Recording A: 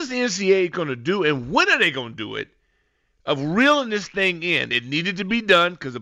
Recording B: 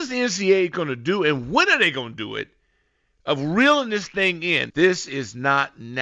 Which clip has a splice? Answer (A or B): B